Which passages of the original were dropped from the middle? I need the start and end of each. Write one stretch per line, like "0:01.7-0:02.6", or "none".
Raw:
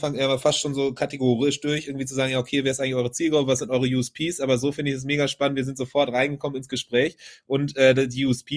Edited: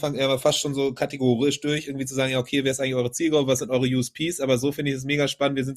none